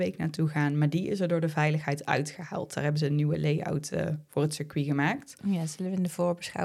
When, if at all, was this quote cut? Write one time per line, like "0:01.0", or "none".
none